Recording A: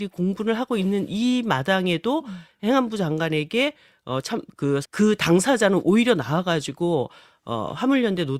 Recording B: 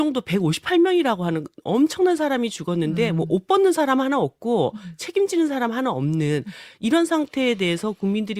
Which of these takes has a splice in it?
A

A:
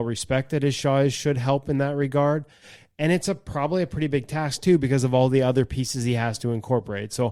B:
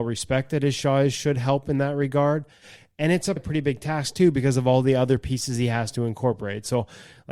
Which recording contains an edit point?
B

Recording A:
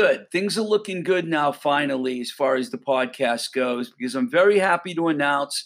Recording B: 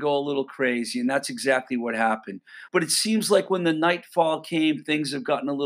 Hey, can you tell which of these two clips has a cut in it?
B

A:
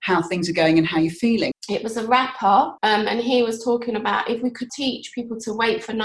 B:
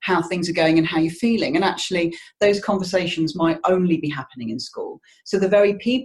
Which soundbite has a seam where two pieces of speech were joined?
A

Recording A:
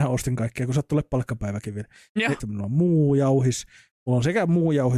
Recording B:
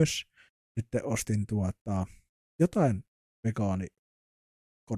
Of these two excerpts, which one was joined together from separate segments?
A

